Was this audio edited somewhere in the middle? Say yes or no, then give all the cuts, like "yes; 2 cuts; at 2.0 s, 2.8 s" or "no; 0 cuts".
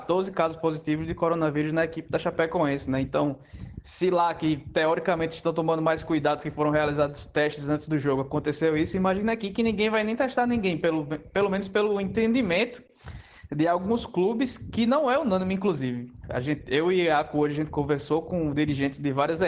no; 0 cuts